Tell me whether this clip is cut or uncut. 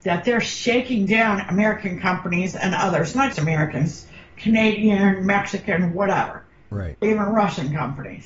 cut